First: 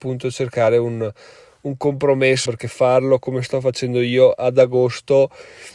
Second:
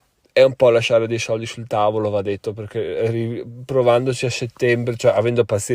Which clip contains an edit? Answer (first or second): first